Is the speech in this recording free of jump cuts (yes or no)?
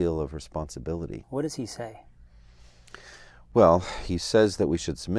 no